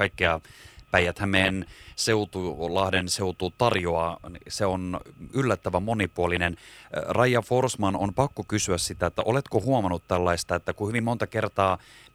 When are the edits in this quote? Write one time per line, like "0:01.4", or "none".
none